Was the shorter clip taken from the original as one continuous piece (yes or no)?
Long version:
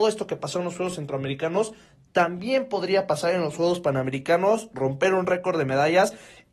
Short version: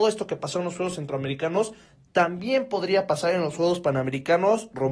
yes